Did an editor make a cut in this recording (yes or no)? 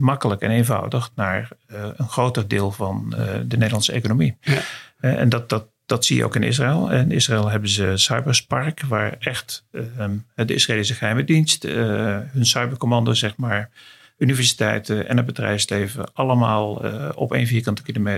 no